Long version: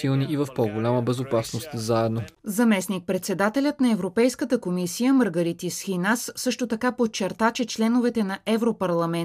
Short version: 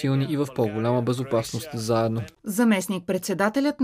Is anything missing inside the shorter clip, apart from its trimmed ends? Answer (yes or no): no